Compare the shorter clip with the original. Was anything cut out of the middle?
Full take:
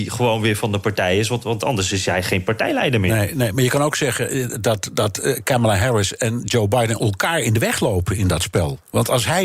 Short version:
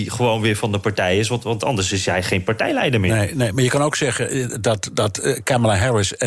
no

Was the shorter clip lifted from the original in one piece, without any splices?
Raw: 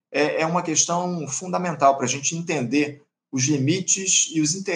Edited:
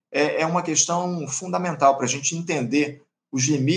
yes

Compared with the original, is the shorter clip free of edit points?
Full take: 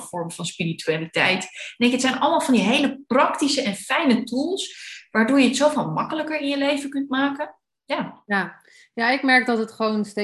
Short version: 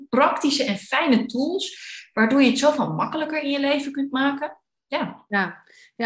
yes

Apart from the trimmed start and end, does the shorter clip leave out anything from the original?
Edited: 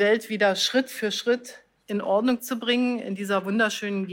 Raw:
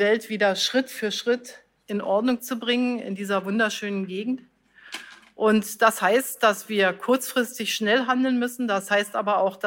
no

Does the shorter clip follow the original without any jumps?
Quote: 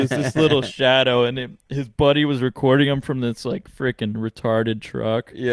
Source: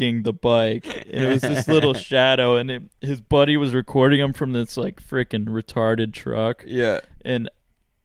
yes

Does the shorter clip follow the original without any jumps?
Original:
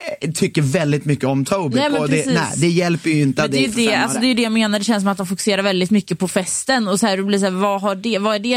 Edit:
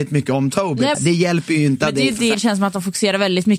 no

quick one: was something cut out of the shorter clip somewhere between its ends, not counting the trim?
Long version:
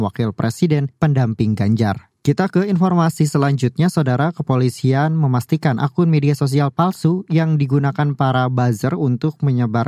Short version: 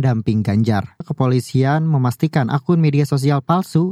yes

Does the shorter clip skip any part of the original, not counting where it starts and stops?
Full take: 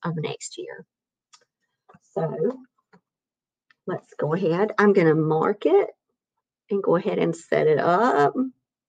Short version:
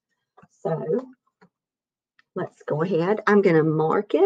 no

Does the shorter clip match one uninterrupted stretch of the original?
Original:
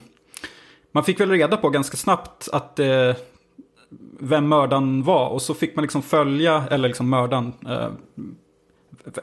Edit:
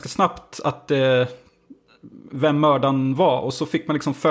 yes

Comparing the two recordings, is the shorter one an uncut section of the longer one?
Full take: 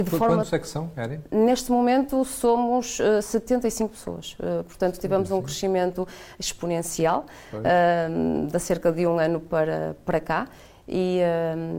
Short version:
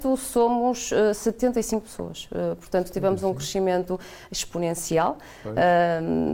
yes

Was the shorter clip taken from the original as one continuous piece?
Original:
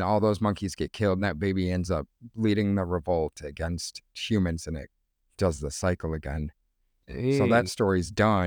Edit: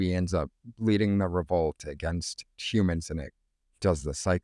yes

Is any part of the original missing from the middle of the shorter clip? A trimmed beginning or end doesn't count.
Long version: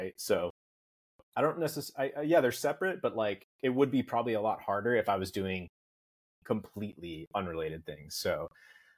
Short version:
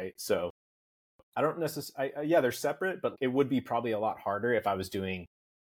yes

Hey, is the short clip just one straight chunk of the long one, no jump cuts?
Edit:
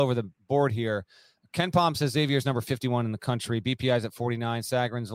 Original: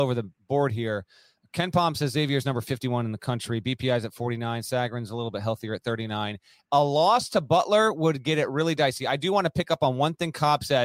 yes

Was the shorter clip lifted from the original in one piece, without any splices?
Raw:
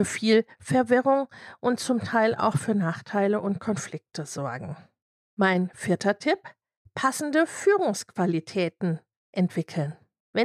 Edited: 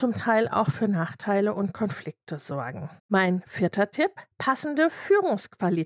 no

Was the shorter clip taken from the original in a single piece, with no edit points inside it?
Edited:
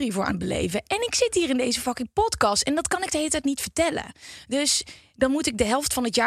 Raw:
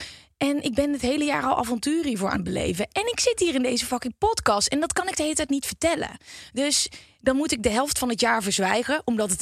yes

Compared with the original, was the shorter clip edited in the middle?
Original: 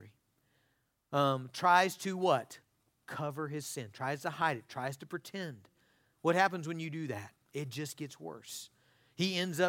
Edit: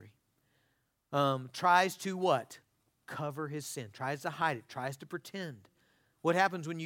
no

